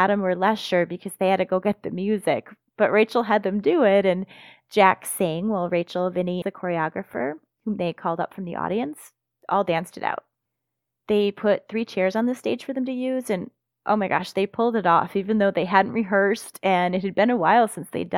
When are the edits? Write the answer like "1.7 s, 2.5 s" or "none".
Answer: 6.4 s